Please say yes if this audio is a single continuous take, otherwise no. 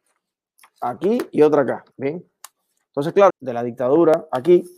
no